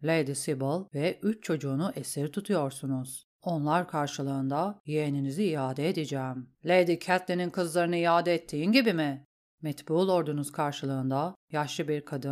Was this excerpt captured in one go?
no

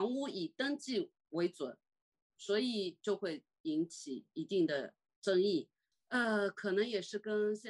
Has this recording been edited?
yes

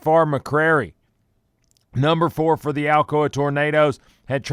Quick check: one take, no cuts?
yes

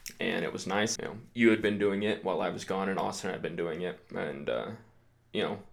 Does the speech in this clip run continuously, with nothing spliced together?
no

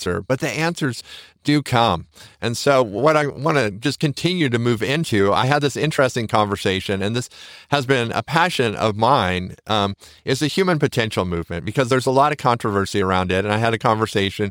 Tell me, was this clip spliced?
no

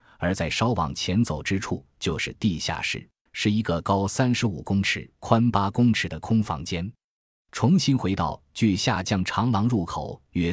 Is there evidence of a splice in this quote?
yes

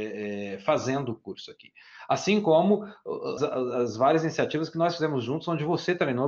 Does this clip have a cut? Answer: yes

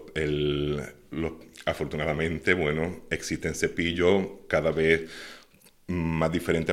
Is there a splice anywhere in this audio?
no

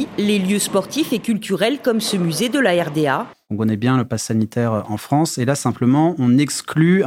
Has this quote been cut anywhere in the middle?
yes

